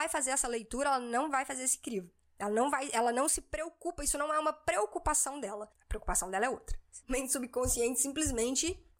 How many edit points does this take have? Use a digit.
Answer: 2